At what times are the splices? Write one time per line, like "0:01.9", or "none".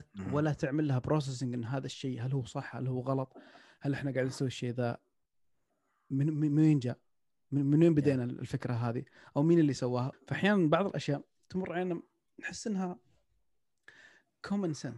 0:10.1